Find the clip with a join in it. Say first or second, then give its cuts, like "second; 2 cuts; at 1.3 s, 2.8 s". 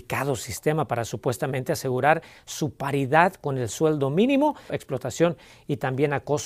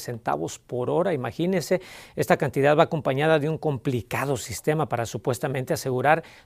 first; 1 cut; at 4.7 s